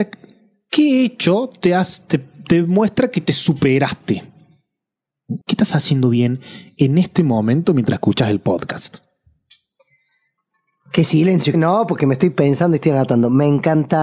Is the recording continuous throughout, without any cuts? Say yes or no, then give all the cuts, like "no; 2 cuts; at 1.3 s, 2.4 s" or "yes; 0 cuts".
no; 2 cuts; at 5.4 s, 11.5 s